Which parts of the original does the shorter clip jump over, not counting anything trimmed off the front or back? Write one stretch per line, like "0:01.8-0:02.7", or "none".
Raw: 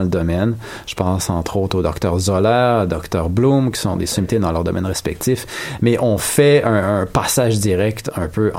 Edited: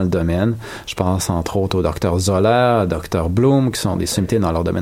none